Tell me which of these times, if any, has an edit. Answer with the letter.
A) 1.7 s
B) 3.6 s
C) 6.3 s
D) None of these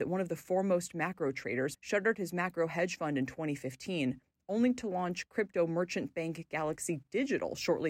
A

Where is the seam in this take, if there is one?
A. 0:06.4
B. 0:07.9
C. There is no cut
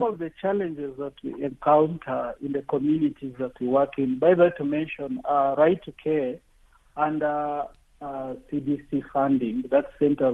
C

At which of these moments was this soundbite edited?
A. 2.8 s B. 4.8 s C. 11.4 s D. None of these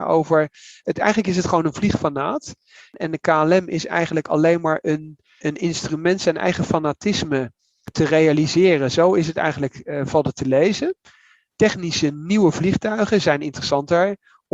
D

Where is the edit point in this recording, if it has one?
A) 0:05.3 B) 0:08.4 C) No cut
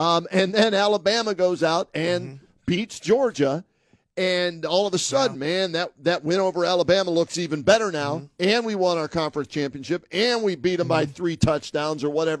C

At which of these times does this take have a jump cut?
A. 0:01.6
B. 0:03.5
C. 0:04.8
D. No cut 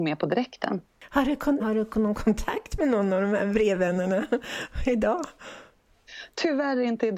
A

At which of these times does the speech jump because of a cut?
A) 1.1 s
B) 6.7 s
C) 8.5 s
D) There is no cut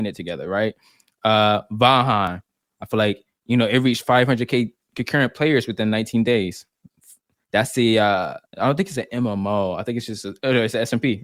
C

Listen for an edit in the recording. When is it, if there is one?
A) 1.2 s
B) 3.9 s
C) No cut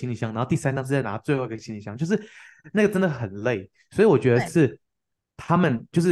C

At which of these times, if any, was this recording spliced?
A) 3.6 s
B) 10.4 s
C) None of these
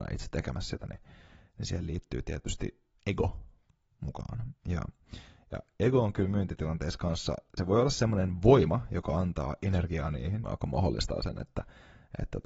B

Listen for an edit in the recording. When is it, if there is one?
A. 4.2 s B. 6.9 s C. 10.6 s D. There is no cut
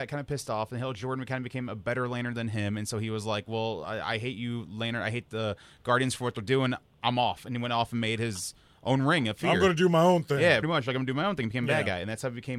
C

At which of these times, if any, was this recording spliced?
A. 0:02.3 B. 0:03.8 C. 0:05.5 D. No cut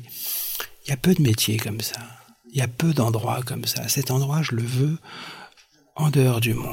D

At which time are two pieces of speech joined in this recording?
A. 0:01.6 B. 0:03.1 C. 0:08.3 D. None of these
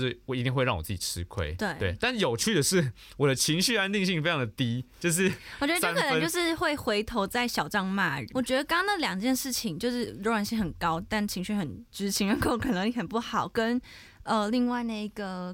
C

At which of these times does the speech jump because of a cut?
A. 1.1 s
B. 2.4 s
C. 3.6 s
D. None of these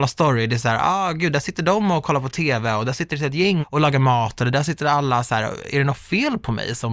C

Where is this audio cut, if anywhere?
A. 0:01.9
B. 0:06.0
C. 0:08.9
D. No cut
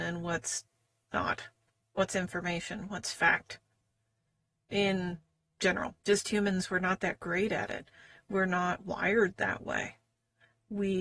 B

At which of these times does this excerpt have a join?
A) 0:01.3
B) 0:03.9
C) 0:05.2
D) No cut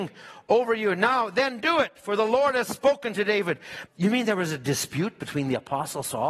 B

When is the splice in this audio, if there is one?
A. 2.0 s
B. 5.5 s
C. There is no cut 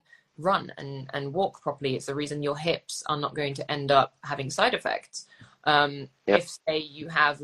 C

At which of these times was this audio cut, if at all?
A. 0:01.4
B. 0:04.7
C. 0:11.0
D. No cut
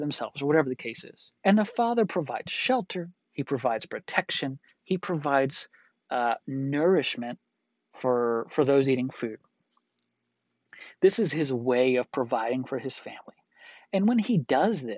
A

